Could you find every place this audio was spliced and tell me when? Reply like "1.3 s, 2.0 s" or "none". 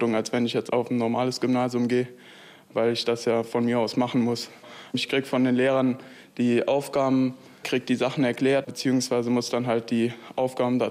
7.6 s, 8.6 s